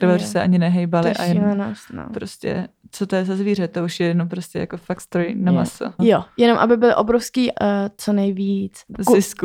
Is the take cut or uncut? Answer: cut